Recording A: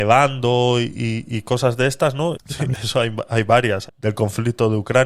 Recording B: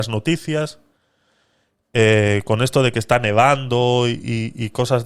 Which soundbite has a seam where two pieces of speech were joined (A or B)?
A